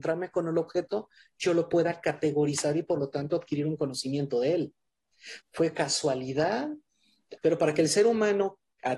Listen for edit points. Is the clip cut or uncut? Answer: cut